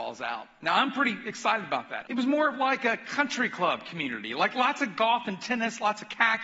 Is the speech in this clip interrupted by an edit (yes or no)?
yes